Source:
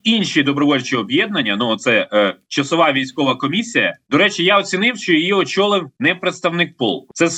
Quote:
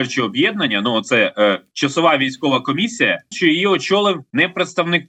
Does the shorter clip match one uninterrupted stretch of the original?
no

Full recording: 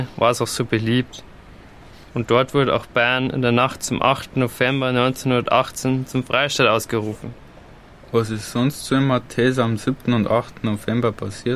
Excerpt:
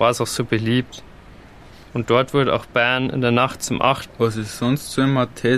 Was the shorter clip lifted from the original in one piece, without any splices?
no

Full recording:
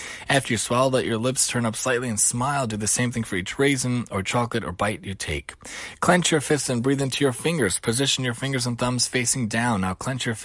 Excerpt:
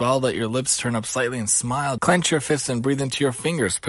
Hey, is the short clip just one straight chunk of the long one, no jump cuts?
no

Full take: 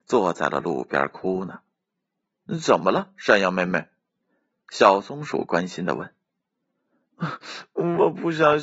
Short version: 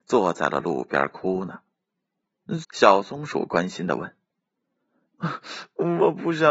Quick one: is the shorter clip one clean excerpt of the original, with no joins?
no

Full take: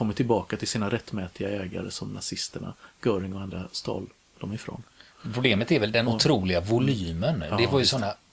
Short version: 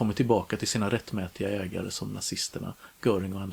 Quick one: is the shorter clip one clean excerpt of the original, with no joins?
yes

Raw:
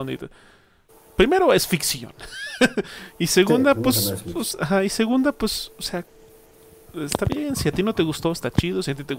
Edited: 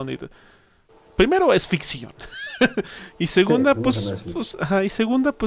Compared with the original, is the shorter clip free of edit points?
yes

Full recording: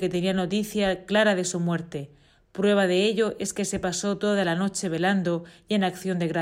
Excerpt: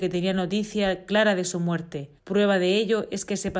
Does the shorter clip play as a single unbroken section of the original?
no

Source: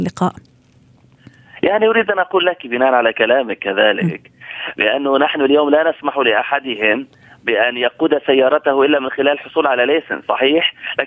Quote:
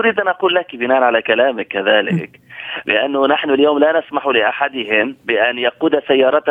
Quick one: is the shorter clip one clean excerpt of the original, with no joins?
no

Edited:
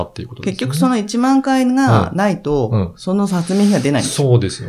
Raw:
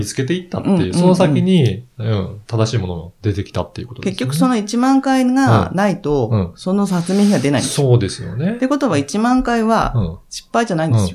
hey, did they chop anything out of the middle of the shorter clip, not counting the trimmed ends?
no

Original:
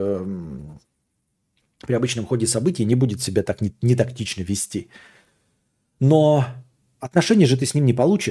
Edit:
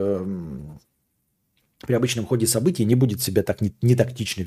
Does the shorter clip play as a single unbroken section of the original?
yes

